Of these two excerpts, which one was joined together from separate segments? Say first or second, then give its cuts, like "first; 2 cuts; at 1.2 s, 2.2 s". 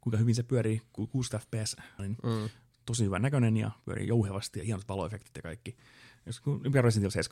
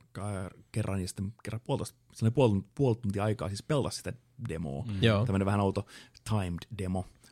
first; 1 cut; at 2.0 s